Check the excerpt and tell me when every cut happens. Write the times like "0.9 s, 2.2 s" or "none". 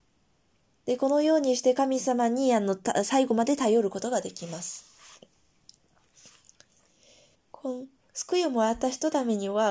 7.3 s